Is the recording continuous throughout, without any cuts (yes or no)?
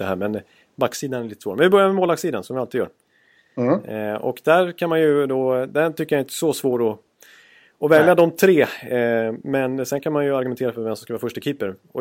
yes